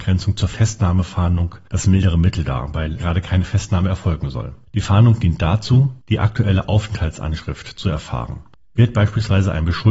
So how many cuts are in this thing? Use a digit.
1